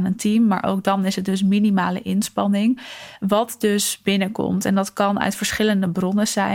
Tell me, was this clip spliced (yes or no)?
no